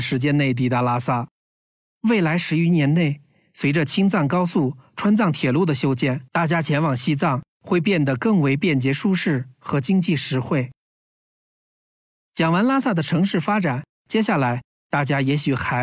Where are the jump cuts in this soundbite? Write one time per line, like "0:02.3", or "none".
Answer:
none